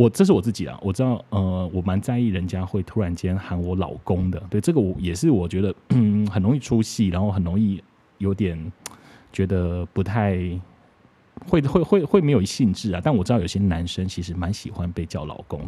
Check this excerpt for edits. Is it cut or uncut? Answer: uncut